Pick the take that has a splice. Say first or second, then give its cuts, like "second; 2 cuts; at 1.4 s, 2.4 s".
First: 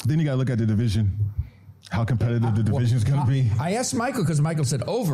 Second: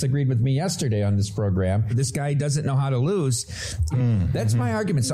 second; 2 cuts; at 1.9 s, 3.9 s